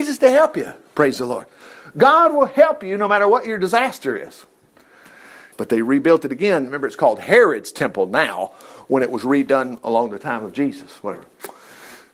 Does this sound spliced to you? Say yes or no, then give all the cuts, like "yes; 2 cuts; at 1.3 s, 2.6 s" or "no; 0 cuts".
yes; 1 cut; at 5.5 s